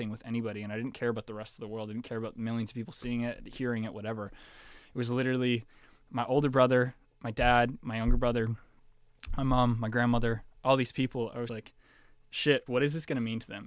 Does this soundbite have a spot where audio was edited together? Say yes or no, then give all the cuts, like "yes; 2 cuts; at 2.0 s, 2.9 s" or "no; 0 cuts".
yes; 2 cuts; at 11.5 s, 12.7 s